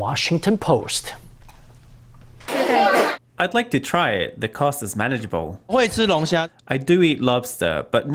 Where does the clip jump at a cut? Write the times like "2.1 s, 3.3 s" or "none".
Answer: 2.5 s